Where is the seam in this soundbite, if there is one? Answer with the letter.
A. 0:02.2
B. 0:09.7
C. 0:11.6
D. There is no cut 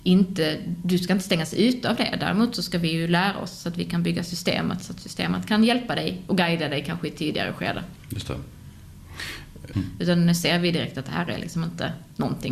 B